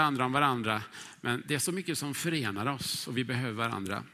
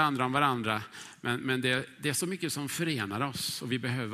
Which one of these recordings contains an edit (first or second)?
first